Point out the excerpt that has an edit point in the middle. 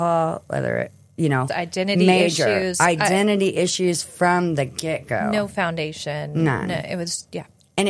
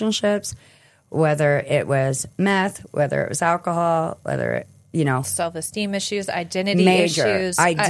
first; 1 cut; at 1.5 s

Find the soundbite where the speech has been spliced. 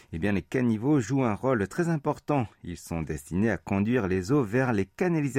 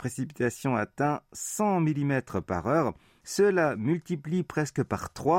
second; 1 cut; at 3.2 s

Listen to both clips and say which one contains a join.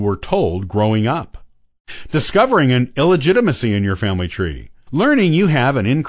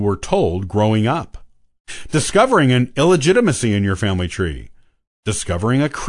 first; 1 cut; at 4.9 s

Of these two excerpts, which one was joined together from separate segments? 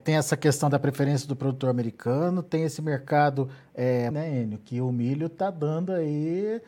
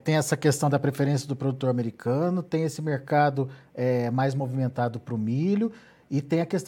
first; 1 cut; at 4.1 s

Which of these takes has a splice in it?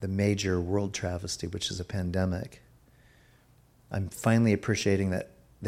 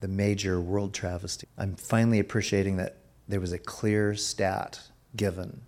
second; 1 cut; at 1.4 s

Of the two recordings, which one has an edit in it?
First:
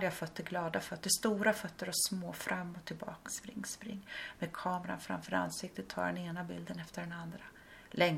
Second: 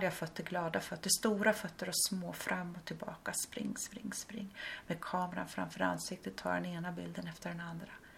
first; 1 cut; at 3.3 s

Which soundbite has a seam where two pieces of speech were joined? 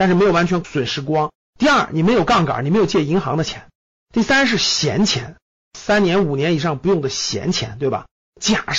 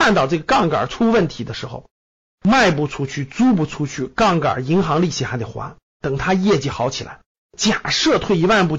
second; 2 cuts; at 6.0 s, 7.4 s

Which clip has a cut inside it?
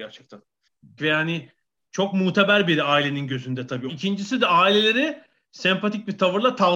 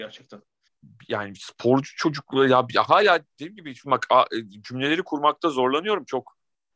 first; 2 cuts; at 1.0 s, 3.9 s

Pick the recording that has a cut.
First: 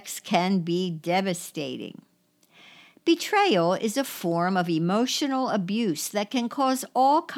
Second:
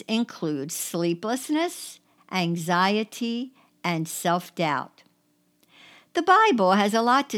second; 1 cut; at 2.2 s

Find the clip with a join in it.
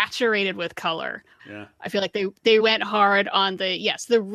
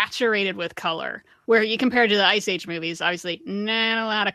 first; 2 cuts; at 1.4 s, 2.6 s

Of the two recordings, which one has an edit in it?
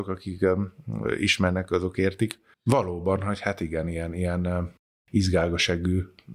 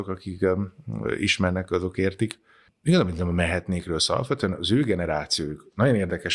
first; 1 cut; at 2.5 s

